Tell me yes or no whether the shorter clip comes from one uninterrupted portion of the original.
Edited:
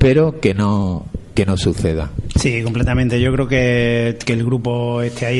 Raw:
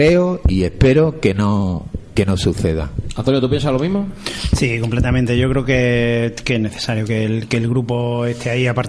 no